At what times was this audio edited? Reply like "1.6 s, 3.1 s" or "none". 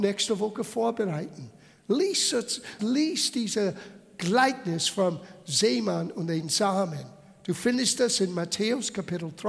2.8 s

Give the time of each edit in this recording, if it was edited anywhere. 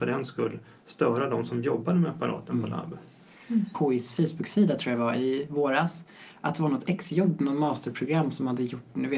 3.7 s

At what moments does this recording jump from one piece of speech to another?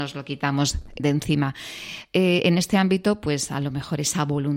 1.0 s

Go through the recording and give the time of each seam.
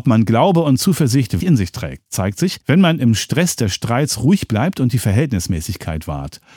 1.4 s, 2.6 s

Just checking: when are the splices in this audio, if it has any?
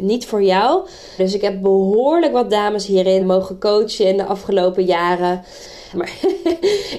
1.2 s, 3.2 s, 5.9 s

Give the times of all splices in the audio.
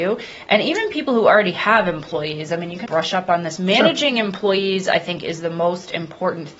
2.8 s

